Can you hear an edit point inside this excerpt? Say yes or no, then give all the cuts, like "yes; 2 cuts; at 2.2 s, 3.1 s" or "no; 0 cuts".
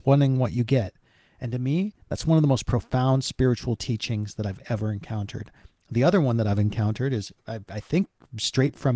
no; 0 cuts